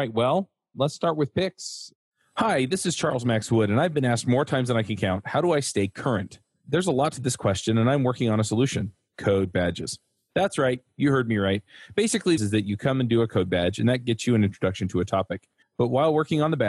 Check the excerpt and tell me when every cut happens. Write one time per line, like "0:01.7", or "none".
0:12.4
0:15.6